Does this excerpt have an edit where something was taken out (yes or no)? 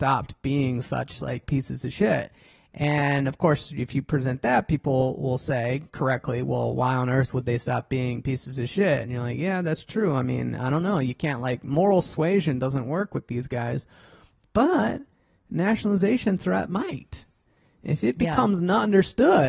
no